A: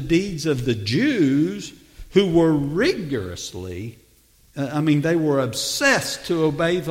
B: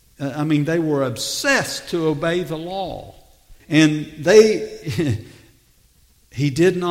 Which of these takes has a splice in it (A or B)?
B